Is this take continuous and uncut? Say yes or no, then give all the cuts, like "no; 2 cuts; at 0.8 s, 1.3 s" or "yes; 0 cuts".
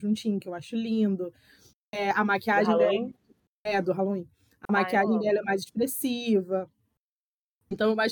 yes; 0 cuts